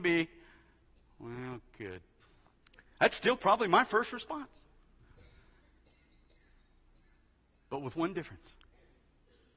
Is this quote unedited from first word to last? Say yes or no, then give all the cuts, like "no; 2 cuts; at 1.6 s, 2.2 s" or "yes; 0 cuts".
yes; 0 cuts